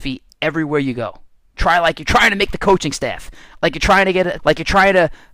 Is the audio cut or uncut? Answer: cut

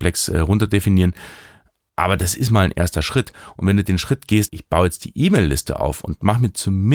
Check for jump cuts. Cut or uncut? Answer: cut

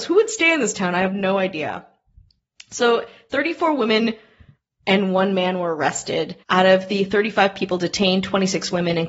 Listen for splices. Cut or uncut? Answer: cut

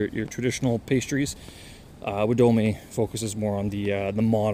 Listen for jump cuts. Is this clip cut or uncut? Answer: uncut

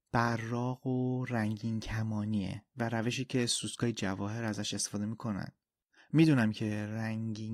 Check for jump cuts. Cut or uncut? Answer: uncut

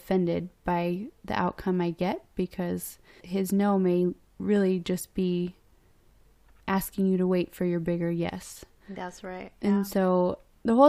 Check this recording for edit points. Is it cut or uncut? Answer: uncut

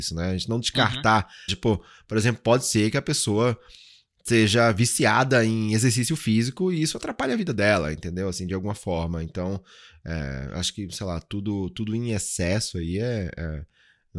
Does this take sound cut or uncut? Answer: cut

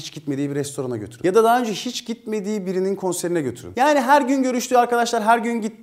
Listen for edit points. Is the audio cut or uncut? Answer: cut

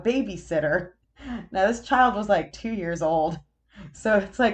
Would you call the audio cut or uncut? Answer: uncut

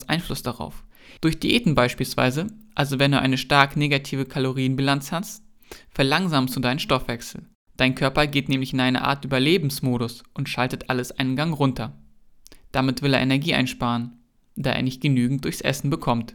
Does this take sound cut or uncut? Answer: cut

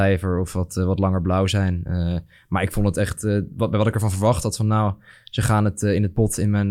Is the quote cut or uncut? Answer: uncut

